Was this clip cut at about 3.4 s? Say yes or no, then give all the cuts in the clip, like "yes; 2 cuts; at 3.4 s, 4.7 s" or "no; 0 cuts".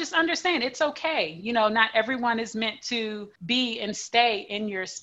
yes; 1 cut; at 3.4 s